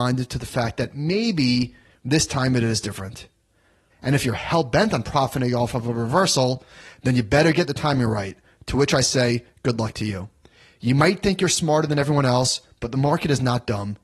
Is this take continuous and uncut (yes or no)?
no